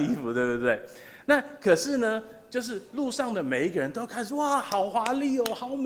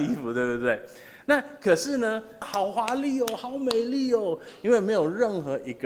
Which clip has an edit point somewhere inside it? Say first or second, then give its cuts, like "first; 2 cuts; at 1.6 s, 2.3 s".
second; 1 cut; at 2.4 s